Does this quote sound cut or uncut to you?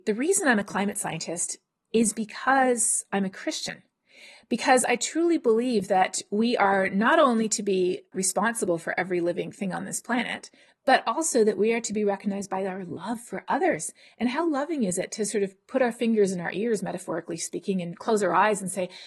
cut